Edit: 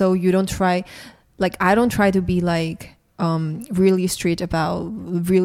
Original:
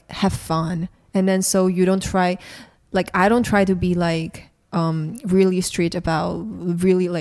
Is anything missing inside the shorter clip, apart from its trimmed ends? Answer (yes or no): no